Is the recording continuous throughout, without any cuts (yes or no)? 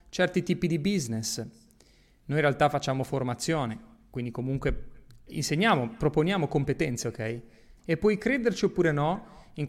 no